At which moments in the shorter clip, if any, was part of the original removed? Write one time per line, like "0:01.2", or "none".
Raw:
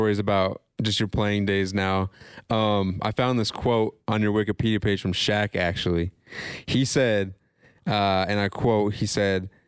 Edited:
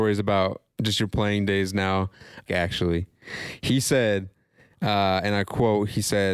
0:02.5